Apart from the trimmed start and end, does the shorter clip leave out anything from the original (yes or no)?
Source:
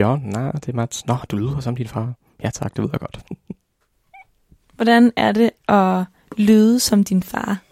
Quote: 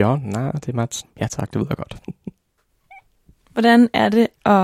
yes